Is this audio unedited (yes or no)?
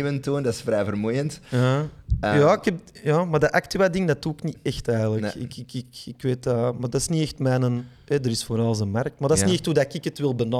yes